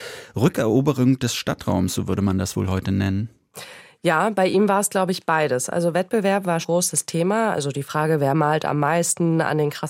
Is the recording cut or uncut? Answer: cut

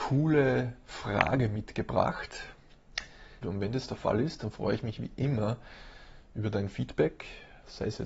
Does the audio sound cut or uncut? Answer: cut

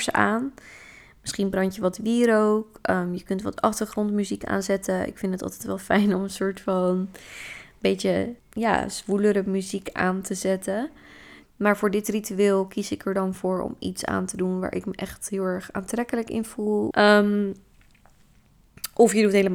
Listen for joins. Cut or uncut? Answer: cut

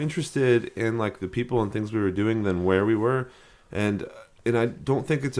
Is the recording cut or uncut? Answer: uncut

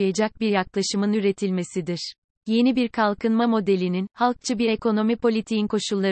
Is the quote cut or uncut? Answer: uncut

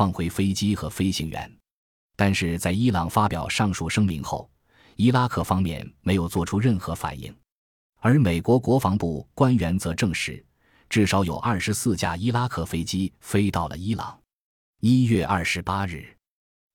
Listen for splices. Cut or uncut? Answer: uncut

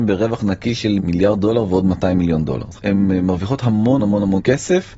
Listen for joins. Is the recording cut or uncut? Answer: cut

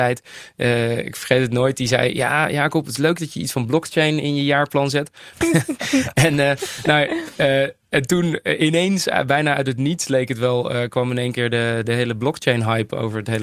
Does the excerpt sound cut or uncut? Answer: cut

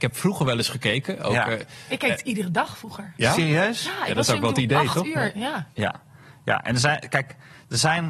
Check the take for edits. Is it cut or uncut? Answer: cut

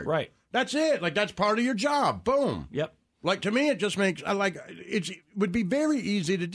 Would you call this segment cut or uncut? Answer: uncut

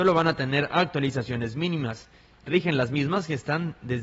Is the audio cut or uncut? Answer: cut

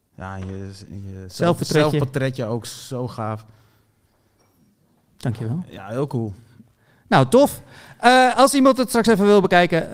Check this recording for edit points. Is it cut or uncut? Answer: uncut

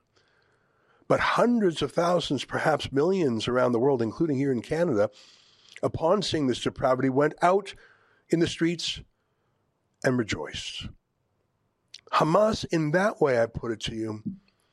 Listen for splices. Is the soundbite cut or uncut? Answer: cut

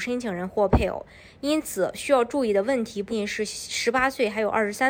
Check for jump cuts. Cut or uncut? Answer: cut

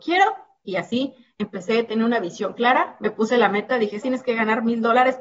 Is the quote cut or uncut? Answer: cut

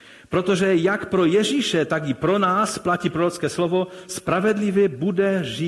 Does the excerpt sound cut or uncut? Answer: uncut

